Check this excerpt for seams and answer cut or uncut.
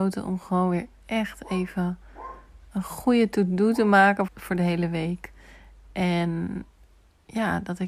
cut